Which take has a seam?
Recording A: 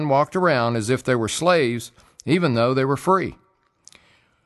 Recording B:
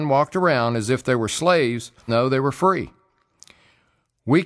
B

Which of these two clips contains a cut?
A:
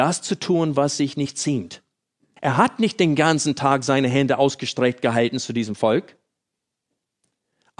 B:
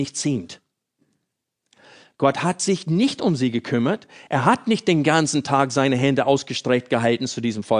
A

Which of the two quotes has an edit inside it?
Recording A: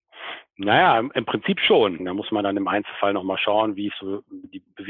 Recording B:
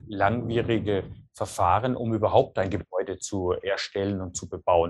A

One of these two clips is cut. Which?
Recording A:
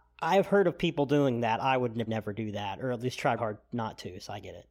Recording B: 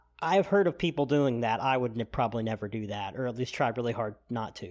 A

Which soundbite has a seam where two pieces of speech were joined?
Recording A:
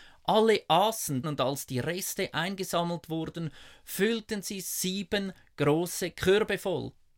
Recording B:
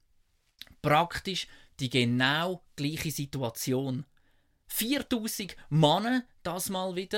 A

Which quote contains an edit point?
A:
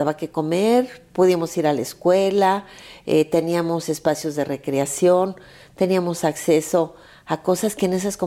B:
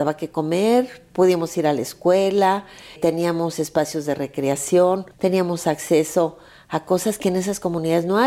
B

